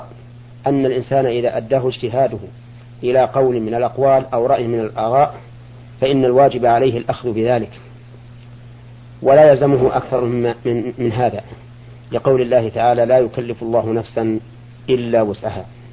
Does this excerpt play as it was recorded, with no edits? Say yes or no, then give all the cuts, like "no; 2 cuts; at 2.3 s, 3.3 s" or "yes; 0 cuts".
yes; 0 cuts